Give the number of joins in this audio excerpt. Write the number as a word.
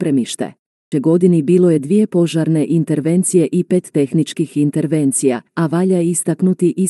two